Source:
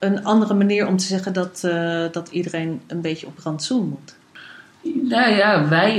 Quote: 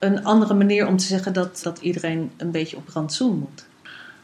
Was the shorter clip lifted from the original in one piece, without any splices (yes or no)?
no